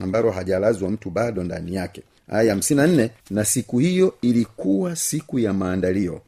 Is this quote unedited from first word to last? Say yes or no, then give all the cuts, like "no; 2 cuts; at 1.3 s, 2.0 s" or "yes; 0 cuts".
yes; 0 cuts